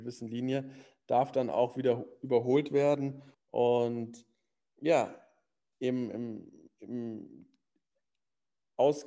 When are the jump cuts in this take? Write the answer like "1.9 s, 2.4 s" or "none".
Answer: 3.3 s